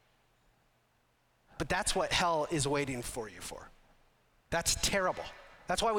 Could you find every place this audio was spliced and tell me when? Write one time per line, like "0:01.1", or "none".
none